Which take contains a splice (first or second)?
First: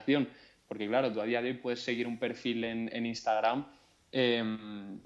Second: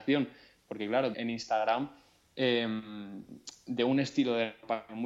second